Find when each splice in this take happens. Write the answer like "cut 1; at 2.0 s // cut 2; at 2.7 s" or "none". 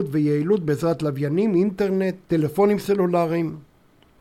cut 1; at 2.2 s